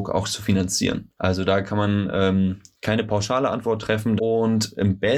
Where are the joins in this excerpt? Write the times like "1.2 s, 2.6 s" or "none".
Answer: 1.2 s, 4.2 s